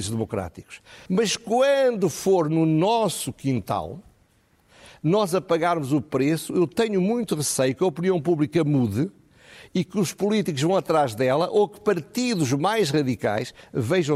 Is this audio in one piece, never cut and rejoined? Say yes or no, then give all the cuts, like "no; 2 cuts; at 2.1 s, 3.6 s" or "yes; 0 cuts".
no; 1 cut; at 1.1 s